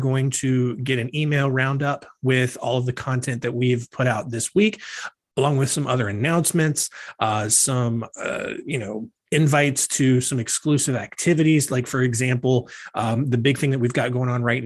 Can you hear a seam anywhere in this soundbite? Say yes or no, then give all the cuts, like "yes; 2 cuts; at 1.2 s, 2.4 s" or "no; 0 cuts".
no; 0 cuts